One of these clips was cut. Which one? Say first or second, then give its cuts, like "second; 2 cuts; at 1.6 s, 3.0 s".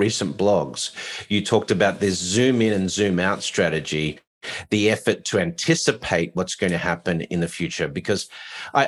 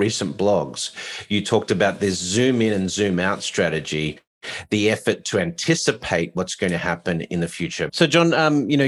second; 1 cut; at 7.9 s